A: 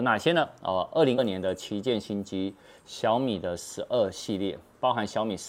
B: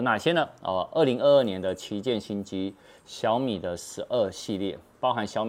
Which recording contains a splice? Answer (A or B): A